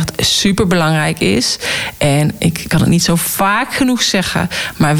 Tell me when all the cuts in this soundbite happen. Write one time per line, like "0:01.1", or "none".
0:02.6